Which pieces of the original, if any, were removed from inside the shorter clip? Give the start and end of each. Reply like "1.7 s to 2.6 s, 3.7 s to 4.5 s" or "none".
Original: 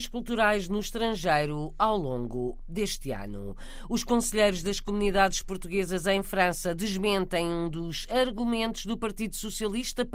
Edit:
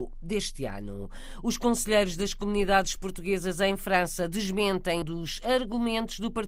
7.5 s to 7.7 s